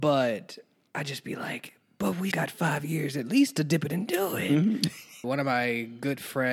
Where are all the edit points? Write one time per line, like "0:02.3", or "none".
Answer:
0:02.3
0:05.2